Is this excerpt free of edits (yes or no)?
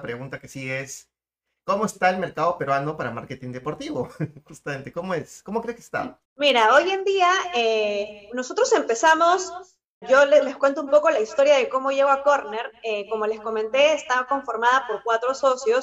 no